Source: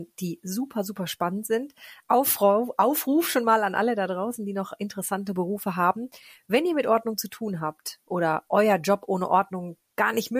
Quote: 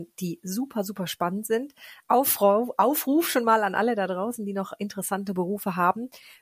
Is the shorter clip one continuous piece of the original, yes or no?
yes